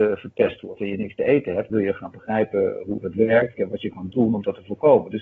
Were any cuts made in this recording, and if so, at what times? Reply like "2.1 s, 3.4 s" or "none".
1.7 s, 3.5 s